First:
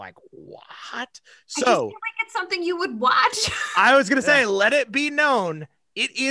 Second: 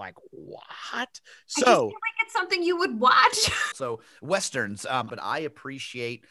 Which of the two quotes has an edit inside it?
second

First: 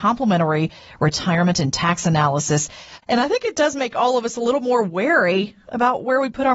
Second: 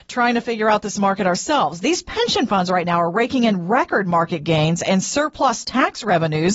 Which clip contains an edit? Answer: first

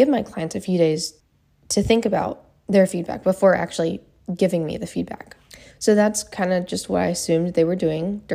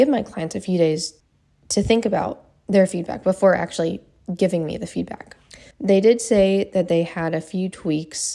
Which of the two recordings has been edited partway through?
second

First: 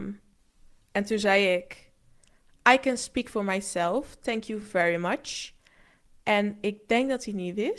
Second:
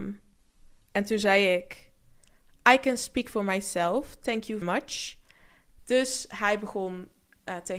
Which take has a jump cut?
second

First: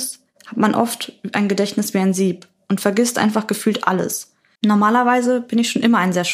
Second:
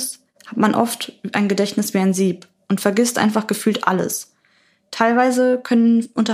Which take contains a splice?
first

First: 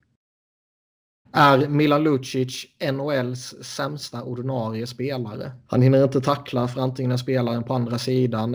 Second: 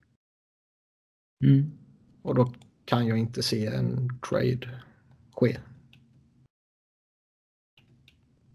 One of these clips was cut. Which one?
first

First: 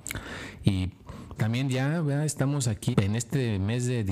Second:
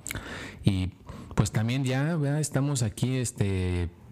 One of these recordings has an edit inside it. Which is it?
first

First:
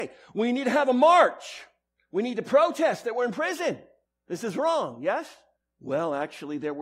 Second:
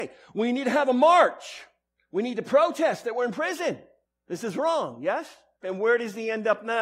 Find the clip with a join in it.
second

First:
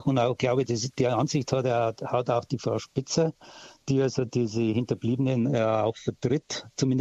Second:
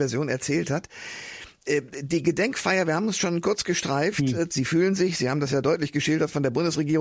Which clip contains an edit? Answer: second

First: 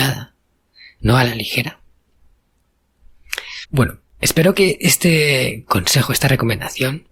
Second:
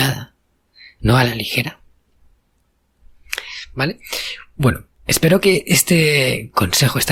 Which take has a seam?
first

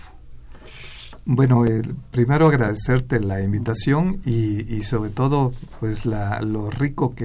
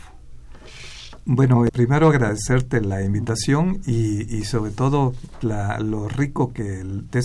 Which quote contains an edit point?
second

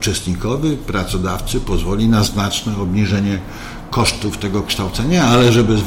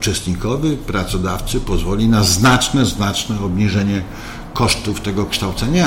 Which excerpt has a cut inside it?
first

